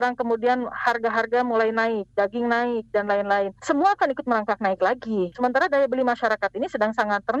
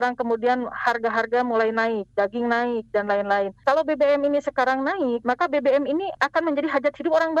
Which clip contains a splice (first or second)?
first